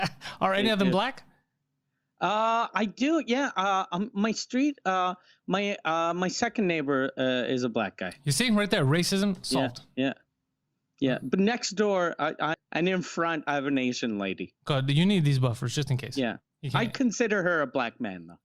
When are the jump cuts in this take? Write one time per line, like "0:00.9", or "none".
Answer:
0:12.5